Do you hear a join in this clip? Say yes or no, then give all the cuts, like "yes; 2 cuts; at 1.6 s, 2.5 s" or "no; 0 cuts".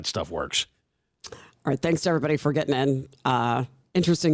no; 0 cuts